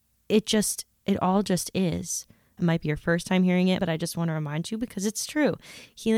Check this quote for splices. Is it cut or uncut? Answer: cut